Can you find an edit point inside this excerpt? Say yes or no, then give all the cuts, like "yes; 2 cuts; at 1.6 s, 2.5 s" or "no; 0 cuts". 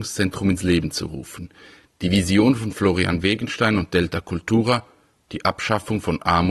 no; 0 cuts